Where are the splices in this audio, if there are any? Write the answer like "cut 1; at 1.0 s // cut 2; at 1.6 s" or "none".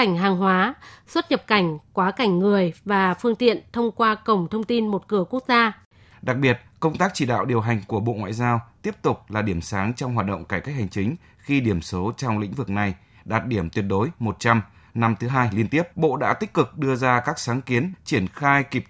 cut 1; at 6.1 s // cut 2; at 15.9 s // cut 3; at 17.9 s

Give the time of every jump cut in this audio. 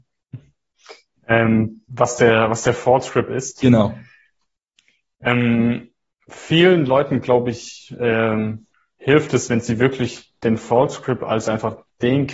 none

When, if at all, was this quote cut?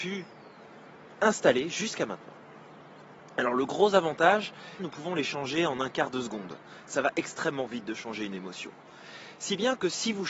cut 1; at 4.8 s

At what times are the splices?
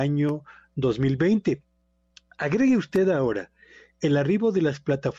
none

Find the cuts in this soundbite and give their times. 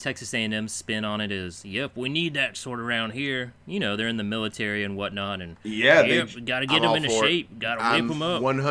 none

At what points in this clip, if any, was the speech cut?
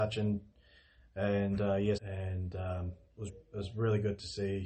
cut 1; at 2.0 s // cut 2; at 3.3 s

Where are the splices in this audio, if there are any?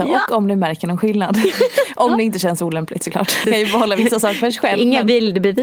cut 1; at 3.4 s

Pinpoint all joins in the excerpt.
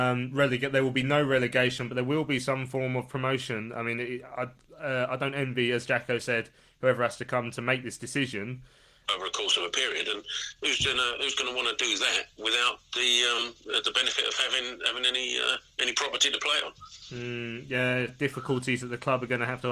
cut 1; at 9.1 s // cut 2; at 18.1 s

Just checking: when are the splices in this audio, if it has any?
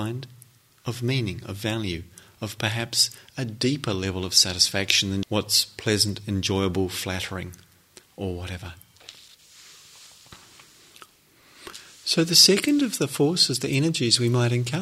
cut 1; at 5.2 s

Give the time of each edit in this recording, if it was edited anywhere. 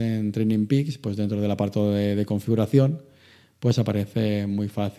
none

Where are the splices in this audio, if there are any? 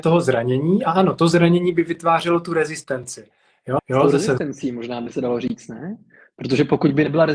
cut 1; at 3.8 s

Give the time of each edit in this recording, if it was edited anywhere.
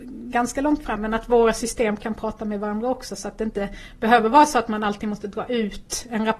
cut 1; at 1.0 s

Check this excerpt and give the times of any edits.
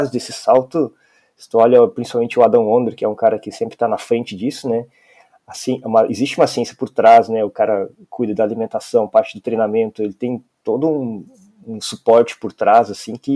none

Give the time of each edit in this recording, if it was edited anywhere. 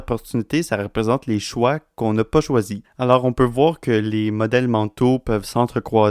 cut 1; at 2.8 s

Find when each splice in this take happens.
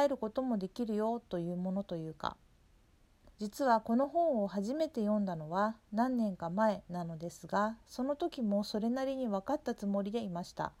cut 1; at 3.3 s

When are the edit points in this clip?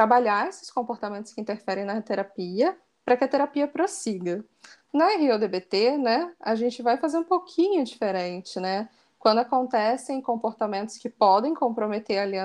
none

